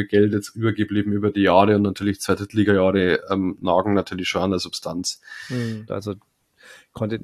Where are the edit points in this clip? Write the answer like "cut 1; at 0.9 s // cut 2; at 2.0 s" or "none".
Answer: cut 1; at 5.9 s